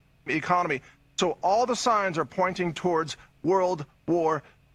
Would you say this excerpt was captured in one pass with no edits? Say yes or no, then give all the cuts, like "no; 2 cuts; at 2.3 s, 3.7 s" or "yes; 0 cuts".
yes; 0 cuts